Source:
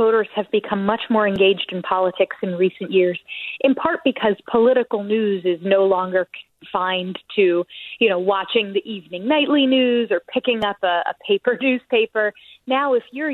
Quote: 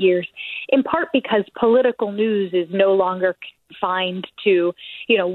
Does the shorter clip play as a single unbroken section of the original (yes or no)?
yes